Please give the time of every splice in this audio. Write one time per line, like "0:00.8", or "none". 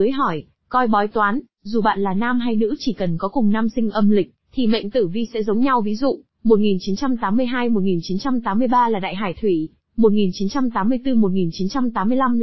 0:01.5

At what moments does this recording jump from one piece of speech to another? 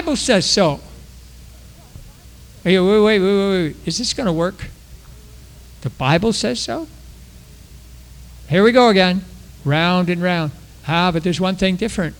none

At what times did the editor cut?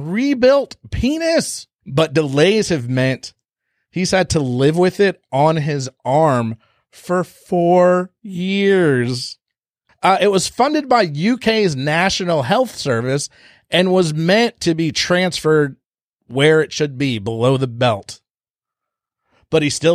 0:09.9

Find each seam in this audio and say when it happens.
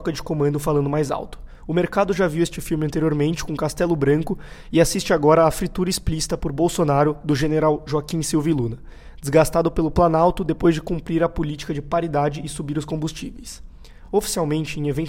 none

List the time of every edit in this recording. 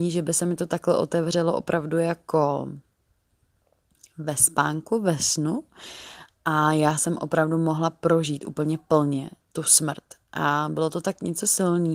none

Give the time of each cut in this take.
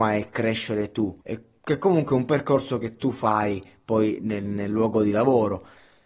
0:01.2
0:04.5

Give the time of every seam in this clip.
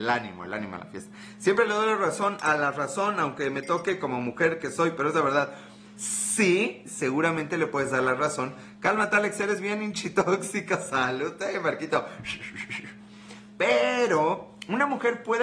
none

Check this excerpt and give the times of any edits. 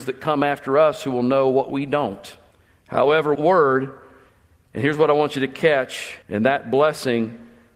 0:03.3
0:06.2

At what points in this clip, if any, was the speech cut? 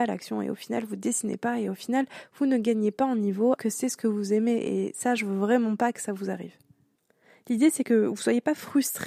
0:03.6

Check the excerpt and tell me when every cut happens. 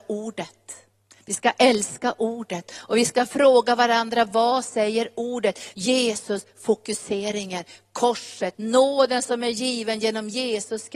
0:05.7
0:08.5

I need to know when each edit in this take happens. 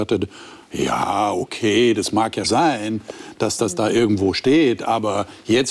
0:02.4

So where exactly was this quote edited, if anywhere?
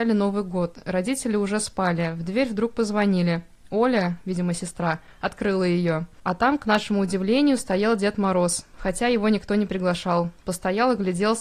none

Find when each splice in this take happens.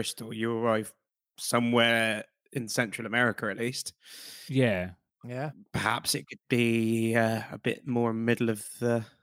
none

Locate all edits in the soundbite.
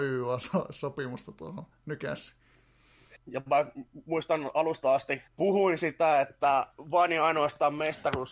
0:03.2
0:05.3

